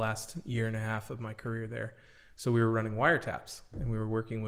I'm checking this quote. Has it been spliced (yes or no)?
no